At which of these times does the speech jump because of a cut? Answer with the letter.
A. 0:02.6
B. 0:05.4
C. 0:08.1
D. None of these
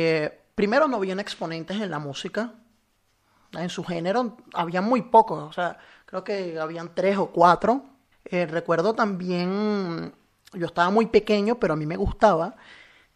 C